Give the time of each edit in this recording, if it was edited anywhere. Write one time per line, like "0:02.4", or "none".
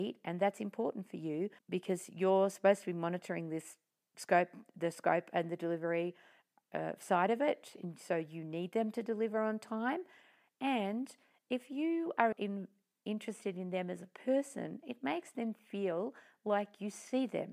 0:01.6
0:12.3